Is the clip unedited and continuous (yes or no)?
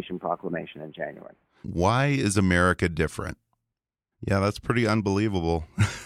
no